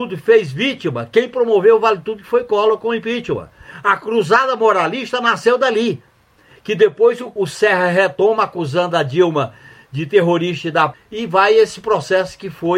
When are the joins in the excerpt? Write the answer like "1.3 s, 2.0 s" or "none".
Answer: 7.4 s, 10.9 s